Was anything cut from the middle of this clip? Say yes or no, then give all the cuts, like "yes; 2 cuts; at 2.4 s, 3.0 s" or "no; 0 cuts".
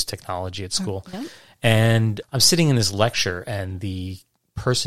yes; 1 cut; at 2.2 s